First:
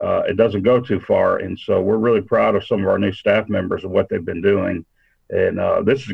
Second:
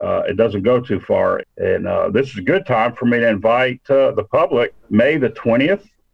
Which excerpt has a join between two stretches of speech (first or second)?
second